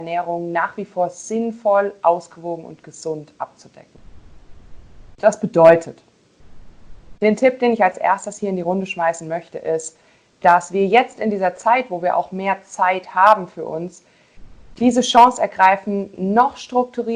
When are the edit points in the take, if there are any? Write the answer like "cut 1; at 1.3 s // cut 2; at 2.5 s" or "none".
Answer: none